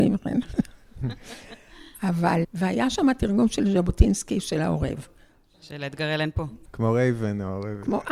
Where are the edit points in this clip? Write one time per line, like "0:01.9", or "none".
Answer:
0:02.4
0:06.6